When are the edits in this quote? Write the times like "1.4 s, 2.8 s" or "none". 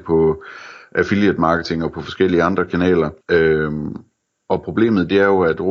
3.2 s